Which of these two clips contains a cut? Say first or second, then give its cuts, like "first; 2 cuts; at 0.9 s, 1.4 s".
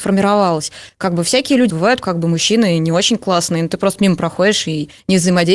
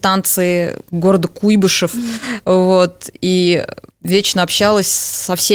first; 1 cut; at 1.7 s